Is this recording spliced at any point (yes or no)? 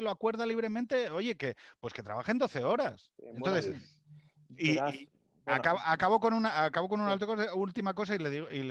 yes